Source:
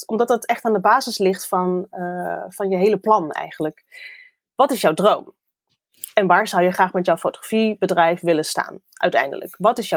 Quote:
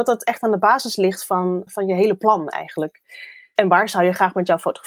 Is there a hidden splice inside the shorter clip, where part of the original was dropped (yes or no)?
yes